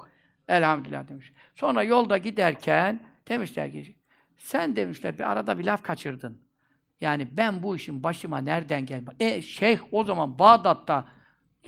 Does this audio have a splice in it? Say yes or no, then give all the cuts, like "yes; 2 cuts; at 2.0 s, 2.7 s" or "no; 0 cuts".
no; 0 cuts